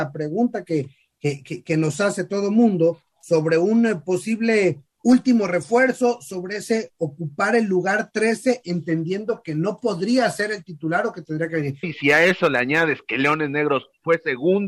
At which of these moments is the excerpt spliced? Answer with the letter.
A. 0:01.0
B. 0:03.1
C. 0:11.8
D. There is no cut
C